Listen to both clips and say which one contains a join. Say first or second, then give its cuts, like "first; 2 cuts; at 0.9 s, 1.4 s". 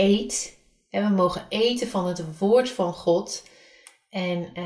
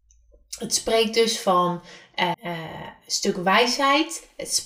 second; 1 cut; at 2.3 s